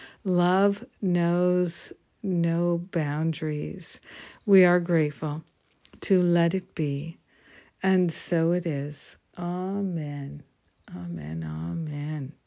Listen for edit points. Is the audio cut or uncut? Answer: uncut